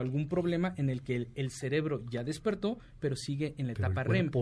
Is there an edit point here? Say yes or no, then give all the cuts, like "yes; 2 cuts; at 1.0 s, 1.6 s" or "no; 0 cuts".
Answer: no; 0 cuts